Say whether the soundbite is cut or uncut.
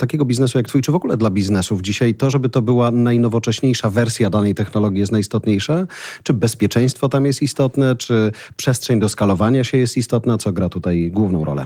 uncut